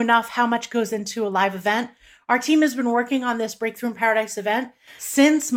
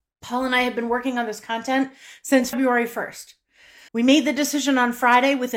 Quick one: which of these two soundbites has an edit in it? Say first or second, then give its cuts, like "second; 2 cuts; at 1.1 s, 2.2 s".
second; 1 cut; at 3.9 s